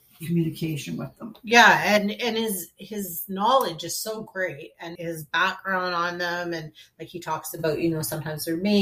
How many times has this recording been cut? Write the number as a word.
one